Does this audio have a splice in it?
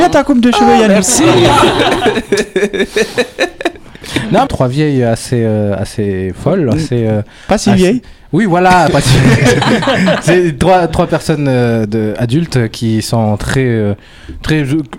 yes; 1 cut; at 4.5 s

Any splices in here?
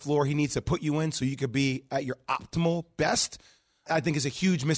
yes; 1 cut; at 3.9 s

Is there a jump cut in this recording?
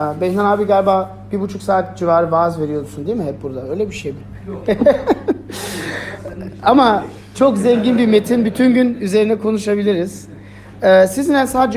no; 0 cuts

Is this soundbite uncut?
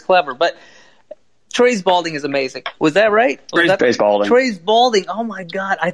no; 2 cuts; at 2.8 s, 3.8 s

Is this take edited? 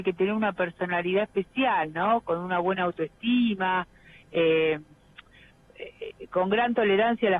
no; 0 cuts

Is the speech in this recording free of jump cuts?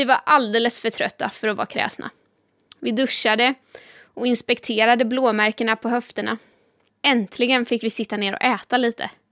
no; 1 cut; at 6.9 s

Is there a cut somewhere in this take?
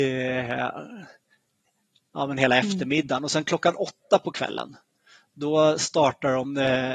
no; 0 cuts

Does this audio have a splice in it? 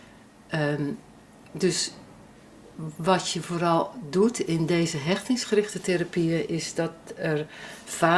no; 0 cuts

